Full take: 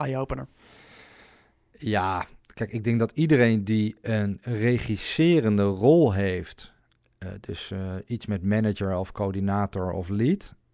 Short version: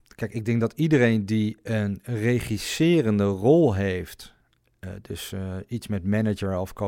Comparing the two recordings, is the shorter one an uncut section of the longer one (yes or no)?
yes